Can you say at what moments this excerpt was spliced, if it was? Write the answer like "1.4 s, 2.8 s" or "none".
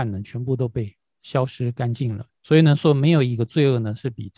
2.3 s